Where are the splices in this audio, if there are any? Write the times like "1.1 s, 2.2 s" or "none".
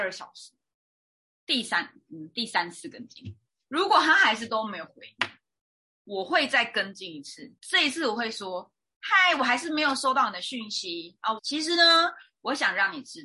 7.6 s, 11.4 s